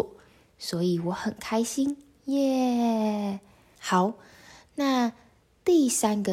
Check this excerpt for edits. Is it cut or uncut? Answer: cut